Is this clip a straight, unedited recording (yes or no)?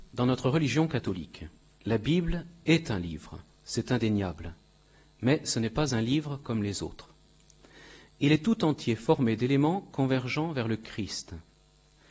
yes